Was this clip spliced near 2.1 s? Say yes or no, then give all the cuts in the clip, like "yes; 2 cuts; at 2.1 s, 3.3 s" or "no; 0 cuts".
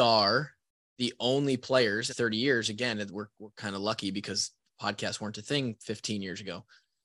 yes; 1 cut; at 2.1 s